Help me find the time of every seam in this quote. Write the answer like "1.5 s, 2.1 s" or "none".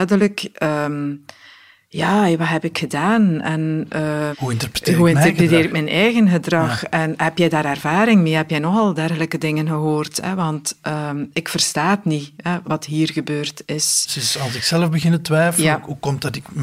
4.3 s, 12.6 s